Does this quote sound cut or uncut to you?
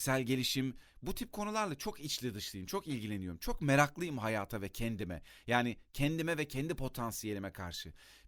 uncut